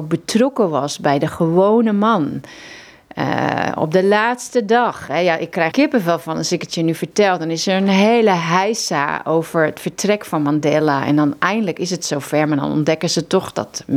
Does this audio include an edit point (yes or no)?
yes